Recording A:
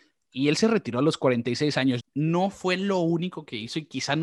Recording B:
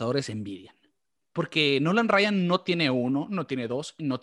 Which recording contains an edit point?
A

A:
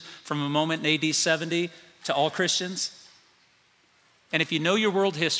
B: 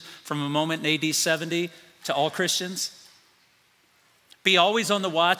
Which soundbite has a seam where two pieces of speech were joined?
A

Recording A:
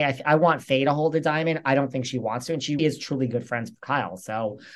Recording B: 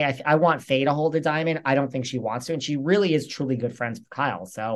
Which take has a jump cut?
A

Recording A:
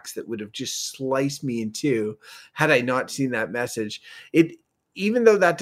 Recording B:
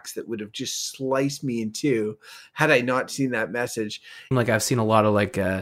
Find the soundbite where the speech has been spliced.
B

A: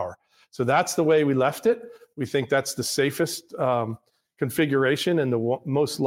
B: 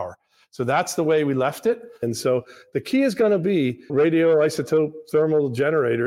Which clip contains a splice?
B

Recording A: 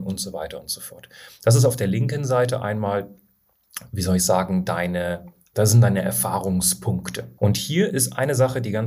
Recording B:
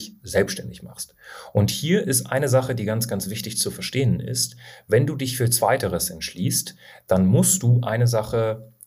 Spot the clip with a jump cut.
A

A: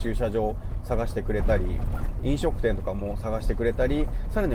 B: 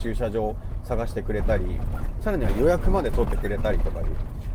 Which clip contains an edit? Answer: B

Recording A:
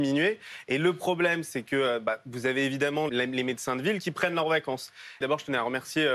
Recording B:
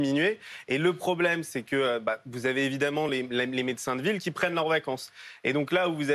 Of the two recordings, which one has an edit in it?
A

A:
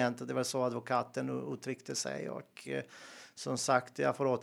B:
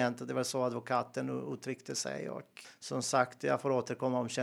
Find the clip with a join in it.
B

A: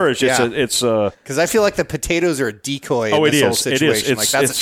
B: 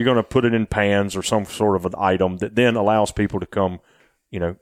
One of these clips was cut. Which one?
A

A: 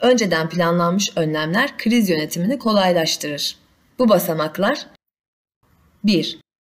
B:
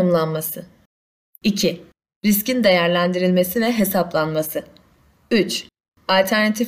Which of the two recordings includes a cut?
A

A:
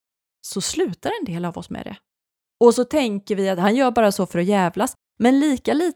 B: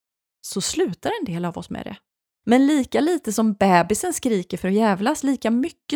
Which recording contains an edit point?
B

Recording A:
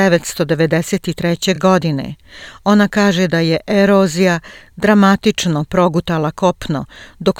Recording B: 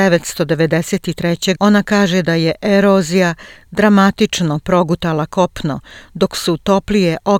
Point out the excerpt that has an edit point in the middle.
B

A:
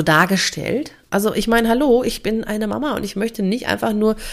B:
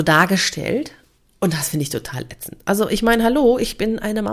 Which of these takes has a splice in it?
A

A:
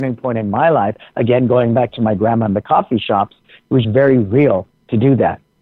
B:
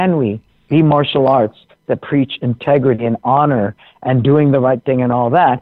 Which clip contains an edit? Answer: A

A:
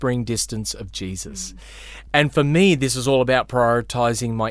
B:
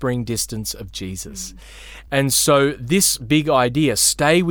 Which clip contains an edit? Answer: B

